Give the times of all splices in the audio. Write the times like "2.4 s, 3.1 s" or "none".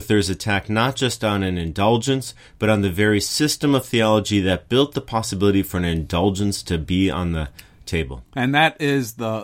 none

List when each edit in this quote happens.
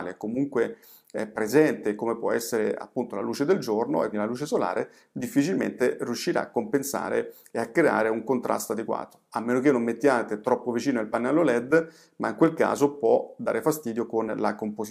4.1 s

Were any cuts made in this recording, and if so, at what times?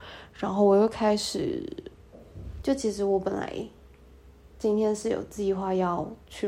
2.6 s

